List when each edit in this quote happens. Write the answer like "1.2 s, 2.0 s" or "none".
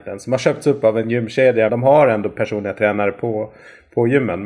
1.7 s